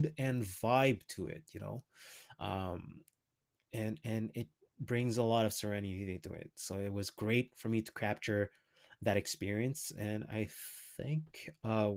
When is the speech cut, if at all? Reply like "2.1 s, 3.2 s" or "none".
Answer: none